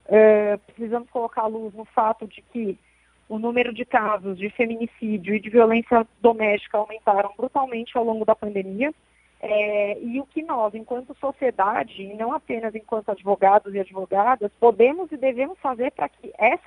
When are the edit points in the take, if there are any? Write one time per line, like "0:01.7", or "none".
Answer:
0:09.3
0:14.5